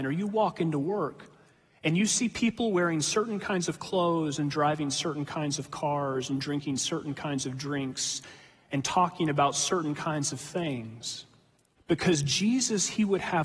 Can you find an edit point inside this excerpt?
yes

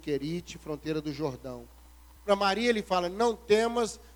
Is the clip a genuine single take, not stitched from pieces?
no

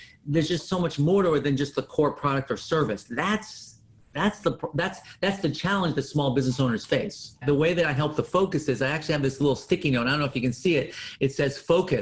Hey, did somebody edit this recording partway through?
yes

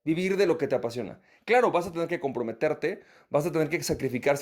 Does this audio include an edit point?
yes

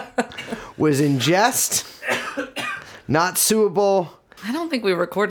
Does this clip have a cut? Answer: yes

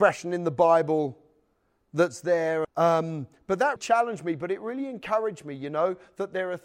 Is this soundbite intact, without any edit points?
no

